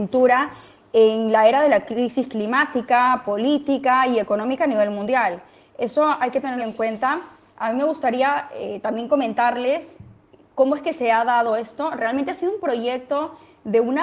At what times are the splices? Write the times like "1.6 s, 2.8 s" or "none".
6.6 s